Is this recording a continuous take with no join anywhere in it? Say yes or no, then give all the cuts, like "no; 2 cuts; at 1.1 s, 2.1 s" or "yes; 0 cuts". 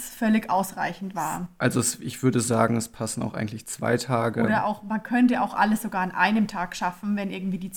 yes; 0 cuts